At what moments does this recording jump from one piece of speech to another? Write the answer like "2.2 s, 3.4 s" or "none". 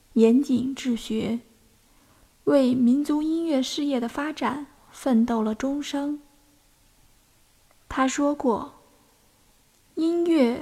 none